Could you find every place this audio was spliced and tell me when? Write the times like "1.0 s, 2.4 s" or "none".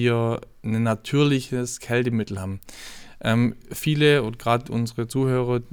none